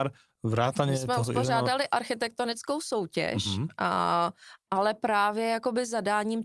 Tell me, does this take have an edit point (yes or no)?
no